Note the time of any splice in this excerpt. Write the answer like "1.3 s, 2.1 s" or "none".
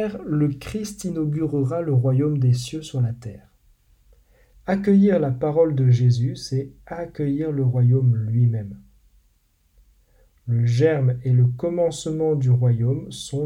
4.5 s